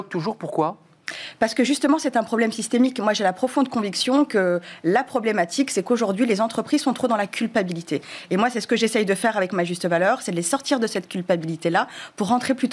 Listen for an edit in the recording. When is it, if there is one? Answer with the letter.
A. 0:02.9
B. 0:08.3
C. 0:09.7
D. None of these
D